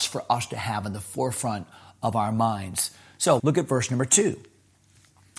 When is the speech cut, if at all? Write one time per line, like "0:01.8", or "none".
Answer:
0:03.4